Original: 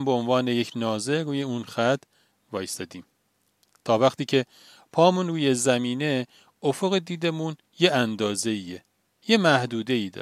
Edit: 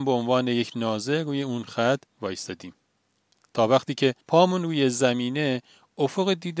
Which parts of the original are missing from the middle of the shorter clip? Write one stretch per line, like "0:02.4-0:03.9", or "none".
0:02.1-0:02.4
0:04.5-0:04.9